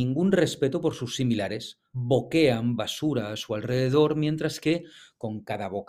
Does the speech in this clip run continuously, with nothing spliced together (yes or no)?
no